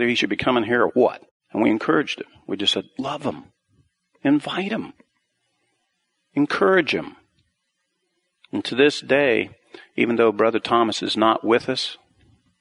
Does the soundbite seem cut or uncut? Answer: uncut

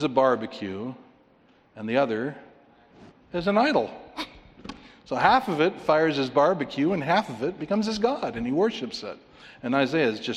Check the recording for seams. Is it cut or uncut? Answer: uncut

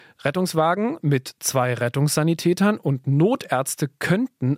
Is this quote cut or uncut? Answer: uncut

